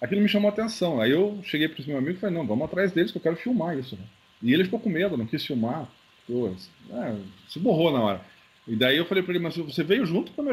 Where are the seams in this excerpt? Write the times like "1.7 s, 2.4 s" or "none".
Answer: none